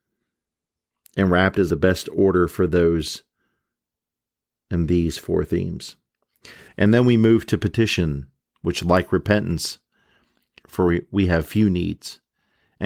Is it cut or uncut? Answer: cut